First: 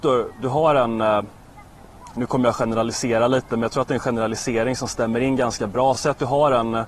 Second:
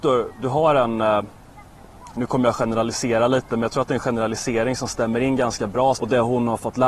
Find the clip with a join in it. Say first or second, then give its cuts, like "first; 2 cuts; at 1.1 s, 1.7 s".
second; 1 cut; at 5.9 s